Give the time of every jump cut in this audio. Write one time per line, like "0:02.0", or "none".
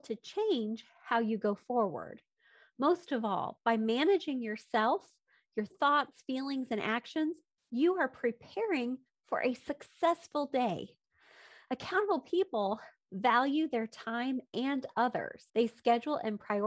0:15.5